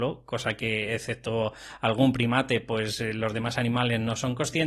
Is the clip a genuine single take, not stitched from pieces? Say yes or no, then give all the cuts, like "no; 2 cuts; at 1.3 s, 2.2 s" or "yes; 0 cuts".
yes; 0 cuts